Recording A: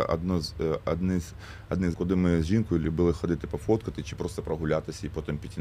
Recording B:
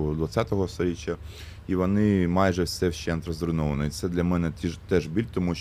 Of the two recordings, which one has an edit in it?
A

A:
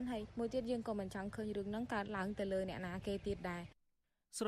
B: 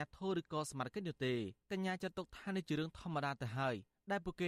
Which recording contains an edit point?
B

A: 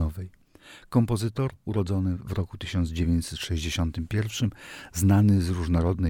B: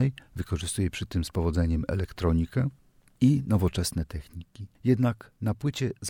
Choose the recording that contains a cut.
B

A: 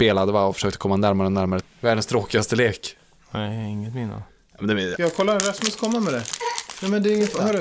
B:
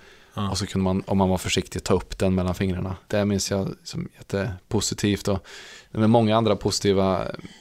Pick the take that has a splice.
A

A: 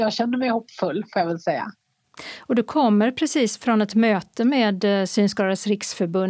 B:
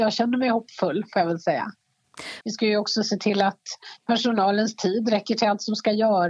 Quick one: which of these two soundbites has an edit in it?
B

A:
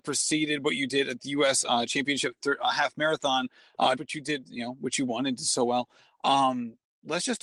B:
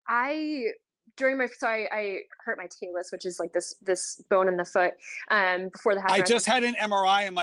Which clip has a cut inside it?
A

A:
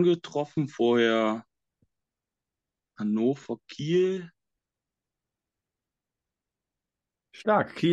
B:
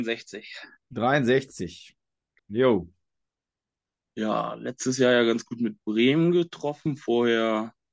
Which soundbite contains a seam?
B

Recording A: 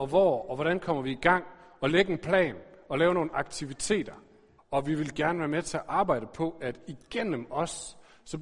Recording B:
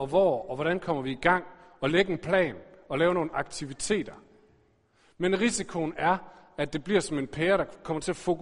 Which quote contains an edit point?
A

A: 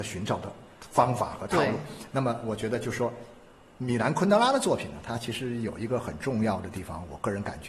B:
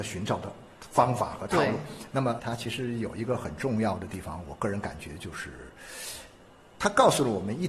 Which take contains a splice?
B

